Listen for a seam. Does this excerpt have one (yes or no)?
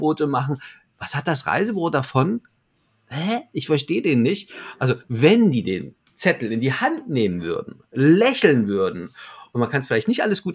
no